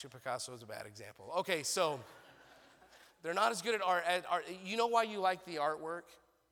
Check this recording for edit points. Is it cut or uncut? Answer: uncut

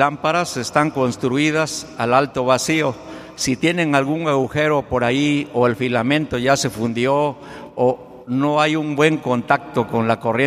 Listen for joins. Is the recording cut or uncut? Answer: uncut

